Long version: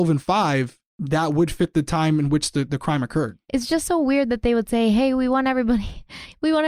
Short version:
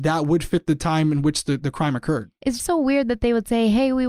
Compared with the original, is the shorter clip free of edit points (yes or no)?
no